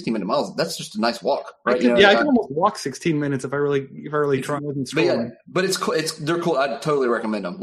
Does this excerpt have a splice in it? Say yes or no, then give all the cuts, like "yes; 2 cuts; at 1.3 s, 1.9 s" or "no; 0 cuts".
yes; 1 cut; at 4.6 s